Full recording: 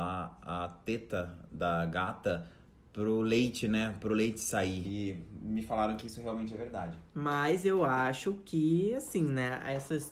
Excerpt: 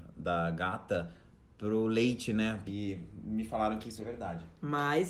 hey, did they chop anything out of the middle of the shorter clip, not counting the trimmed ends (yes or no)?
yes